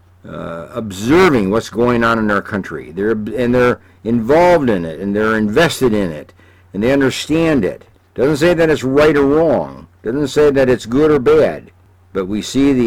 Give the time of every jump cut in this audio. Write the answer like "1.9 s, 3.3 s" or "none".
none